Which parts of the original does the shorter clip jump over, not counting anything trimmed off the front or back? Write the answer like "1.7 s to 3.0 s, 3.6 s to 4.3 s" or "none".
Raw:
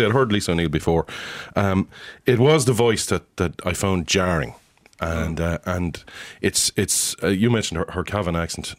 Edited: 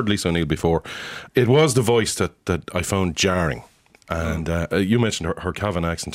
1.5 s to 2.2 s, 5.6 s to 7.2 s